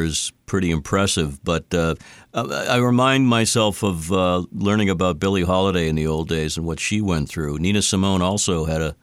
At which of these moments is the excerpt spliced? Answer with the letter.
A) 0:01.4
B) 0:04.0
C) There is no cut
C